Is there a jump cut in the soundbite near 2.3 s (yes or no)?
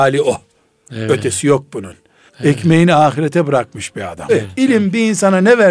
yes